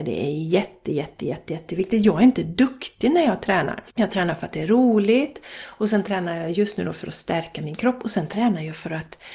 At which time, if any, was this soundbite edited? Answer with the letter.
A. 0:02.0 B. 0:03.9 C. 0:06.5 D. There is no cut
B